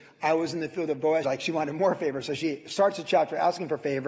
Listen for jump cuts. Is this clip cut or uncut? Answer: cut